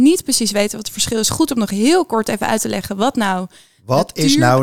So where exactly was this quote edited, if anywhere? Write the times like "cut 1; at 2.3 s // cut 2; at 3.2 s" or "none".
none